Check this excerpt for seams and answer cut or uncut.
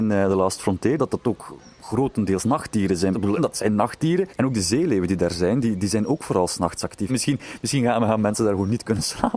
cut